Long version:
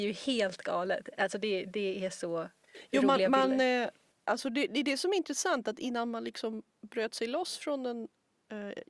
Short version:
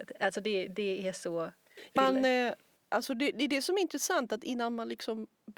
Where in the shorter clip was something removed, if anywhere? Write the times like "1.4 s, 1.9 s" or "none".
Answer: 2.0 s